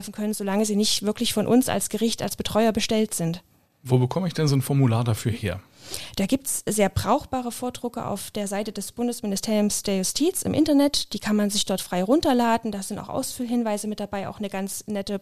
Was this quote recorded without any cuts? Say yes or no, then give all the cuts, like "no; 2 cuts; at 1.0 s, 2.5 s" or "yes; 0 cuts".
yes; 0 cuts